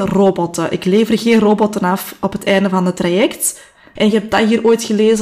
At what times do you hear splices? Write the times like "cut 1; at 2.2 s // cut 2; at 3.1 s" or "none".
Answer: cut 1; at 4.0 s